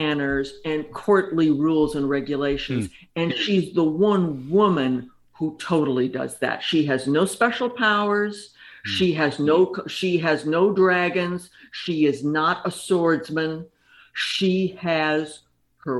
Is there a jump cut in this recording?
no; 0 cuts

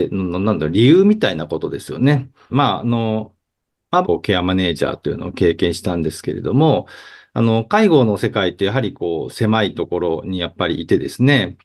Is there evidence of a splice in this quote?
yes; 2 cuts; at 2.5 s, 4.0 s

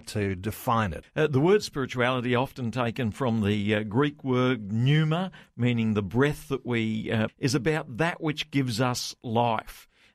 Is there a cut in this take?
yes; 2 cuts; at 1.0 s, 7.3 s

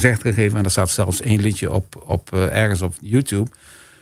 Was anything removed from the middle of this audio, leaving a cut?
no; 0 cuts

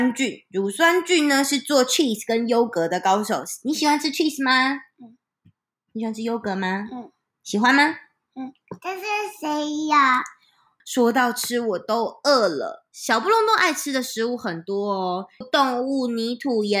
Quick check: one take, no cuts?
no; 2 cuts; at 10.8 s, 15.4 s

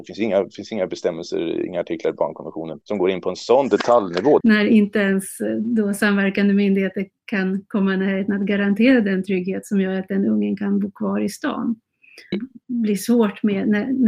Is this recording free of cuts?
no; 2 cuts; at 4.4 s, 12.3 s

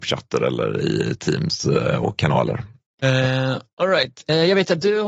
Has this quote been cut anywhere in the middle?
yes; 1 cut; at 2.9 s

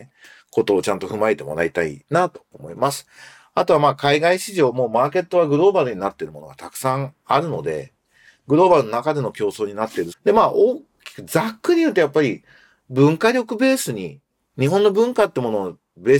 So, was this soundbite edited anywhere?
yes; 1 cut; at 10.1 s

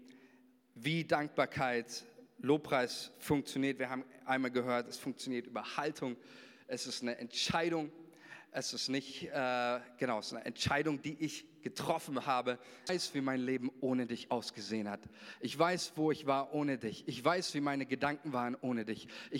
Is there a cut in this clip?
yes; 1 cut; at 12.9 s

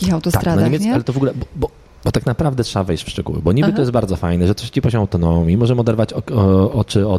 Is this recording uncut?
yes; 0 cuts

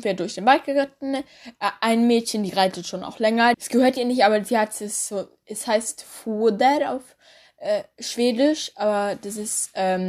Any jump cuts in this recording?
yes; 1 cut; at 3.5 s

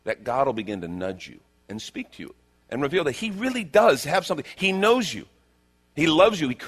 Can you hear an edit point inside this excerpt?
no; 0 cuts

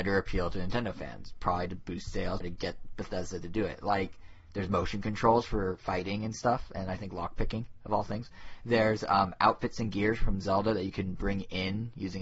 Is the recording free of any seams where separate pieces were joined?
no; 1 cut; at 2.4 s

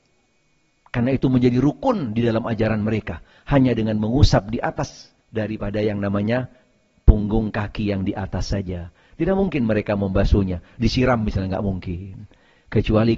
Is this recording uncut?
no; 1 cut; at 5.2 s

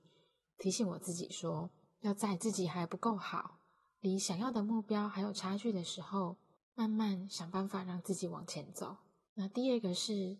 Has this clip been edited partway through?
yes; 2 cuts; at 6.6 s, 9.3 s

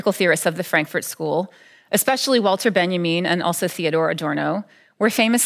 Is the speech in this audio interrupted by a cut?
no; 0 cuts

